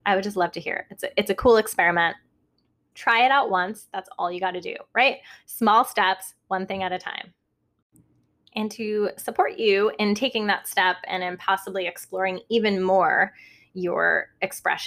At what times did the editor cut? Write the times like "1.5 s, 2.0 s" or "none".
2.9 s